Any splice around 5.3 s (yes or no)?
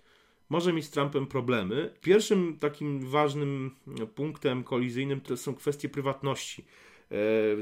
yes